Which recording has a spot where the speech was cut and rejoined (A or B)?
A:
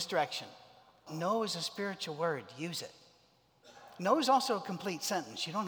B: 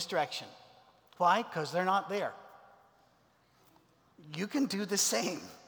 A